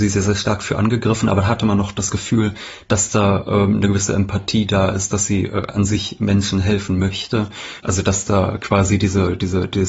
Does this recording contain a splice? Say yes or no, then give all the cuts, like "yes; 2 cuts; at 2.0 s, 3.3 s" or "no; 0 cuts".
yes; 1 cut; at 7.8 s